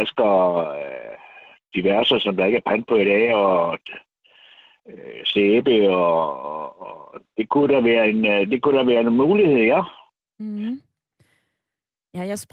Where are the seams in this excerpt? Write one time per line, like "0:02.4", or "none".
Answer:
none